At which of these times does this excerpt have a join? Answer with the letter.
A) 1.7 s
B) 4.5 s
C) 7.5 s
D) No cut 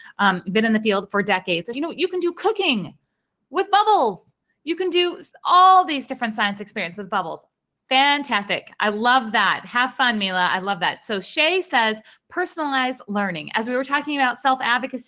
A